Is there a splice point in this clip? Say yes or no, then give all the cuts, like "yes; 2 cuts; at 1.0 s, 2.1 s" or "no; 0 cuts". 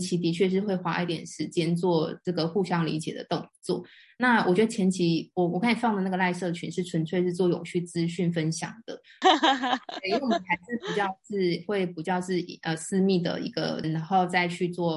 yes; 2 cuts; at 9.2 s, 13.8 s